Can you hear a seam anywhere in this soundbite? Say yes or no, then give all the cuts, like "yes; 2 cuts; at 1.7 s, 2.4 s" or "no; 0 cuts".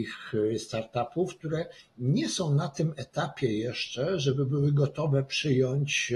no; 0 cuts